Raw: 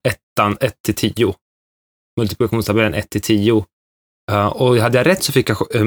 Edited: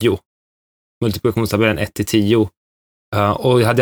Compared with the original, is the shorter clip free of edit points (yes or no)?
yes